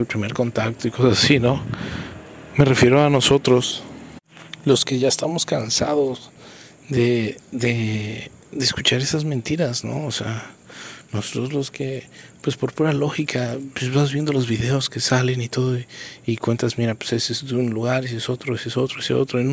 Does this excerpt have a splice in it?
no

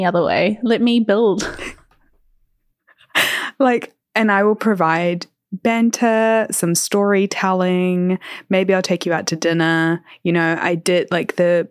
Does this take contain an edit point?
yes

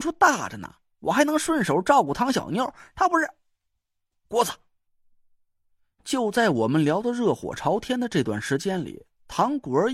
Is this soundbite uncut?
no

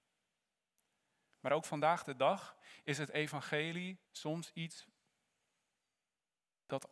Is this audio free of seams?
no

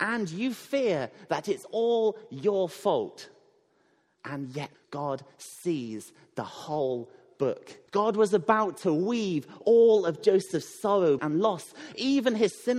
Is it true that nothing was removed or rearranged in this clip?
no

